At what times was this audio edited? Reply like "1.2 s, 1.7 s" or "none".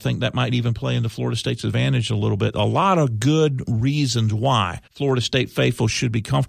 4.9 s